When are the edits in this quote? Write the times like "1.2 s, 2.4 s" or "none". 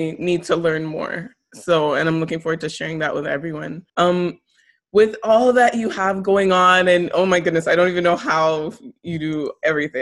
3.9 s